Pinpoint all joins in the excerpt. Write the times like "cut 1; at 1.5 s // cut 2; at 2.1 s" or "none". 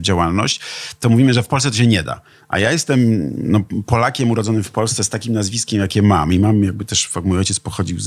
none